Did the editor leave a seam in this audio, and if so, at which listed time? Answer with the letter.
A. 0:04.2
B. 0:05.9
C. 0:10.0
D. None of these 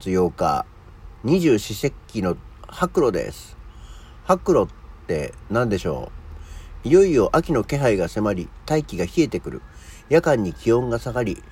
D